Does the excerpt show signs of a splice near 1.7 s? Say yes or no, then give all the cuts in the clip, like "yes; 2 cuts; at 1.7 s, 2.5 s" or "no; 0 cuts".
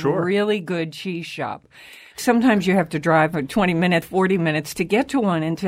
no; 1 cut; at 4.0 s